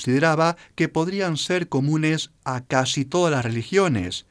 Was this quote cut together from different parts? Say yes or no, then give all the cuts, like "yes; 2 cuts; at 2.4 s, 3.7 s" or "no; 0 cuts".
no; 0 cuts